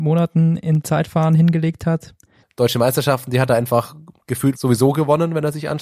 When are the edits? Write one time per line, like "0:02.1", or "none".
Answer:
0:02.4
0:04.6